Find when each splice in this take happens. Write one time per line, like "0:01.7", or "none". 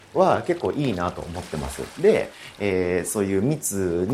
none